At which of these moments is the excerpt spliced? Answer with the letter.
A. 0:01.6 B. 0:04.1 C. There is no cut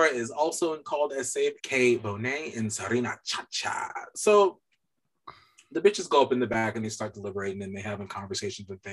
A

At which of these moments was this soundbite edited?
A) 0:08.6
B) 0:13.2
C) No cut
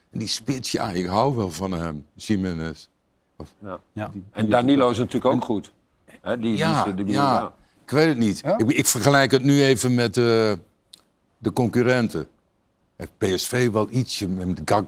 C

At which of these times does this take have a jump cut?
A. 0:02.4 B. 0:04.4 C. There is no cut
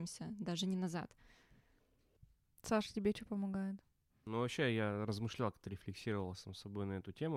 C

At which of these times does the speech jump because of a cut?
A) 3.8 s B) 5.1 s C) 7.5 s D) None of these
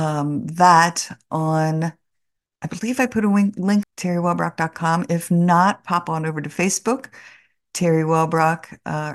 A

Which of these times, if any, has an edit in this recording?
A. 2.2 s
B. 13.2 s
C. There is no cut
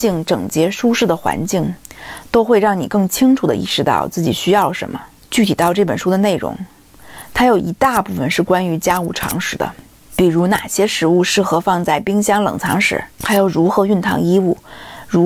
B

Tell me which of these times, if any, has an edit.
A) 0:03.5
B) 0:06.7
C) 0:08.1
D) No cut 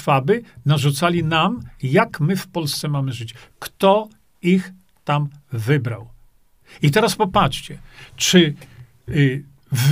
D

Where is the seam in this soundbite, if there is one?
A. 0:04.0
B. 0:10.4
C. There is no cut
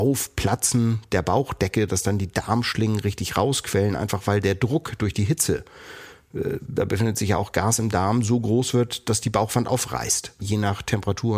B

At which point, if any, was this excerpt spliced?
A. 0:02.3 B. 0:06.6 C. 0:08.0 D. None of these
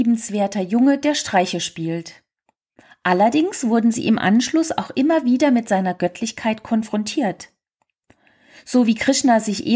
D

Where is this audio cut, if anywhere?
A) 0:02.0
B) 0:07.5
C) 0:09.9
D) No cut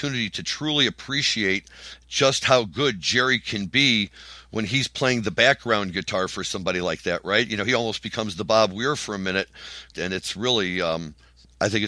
C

